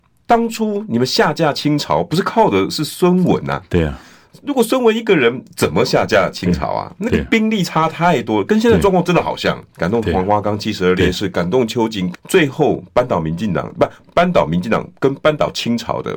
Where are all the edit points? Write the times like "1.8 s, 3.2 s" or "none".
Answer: 9.7 s, 12.1 s